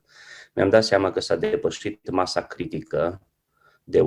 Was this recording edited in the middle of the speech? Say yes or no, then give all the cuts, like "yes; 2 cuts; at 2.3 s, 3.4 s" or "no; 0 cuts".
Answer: no; 0 cuts